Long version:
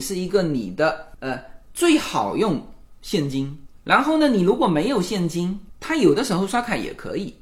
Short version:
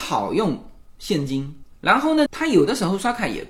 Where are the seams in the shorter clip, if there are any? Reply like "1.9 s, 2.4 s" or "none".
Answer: 2.3 s